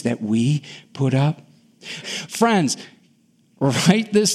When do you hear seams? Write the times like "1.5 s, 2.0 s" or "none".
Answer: 2.0 s